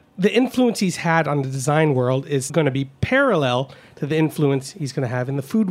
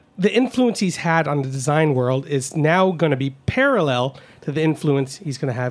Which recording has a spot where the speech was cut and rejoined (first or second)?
first